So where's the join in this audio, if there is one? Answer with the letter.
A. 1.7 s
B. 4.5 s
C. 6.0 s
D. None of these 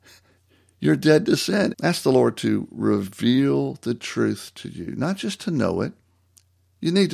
A